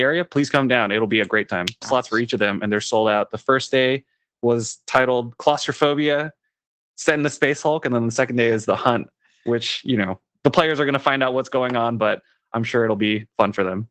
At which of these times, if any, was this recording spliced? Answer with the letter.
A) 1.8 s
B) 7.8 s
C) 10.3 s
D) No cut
A